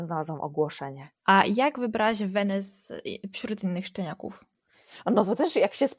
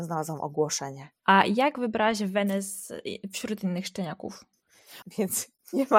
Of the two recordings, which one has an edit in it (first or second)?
second